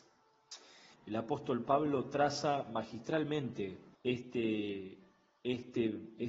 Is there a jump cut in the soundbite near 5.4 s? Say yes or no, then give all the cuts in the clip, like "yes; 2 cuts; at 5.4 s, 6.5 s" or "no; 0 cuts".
no; 2 cuts; at 0.9 s, 3.9 s